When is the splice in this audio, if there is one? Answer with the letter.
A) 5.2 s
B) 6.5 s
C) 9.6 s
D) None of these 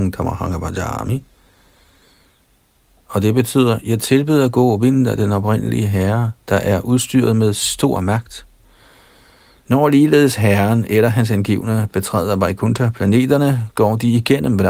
C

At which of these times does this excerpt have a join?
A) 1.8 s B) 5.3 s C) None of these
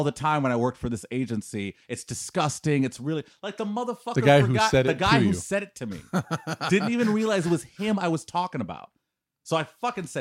C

